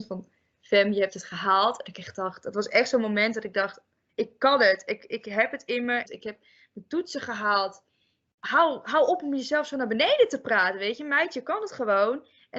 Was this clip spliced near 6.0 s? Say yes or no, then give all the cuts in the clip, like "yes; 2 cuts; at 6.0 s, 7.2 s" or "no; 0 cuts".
yes; 1 cut; at 6.0 s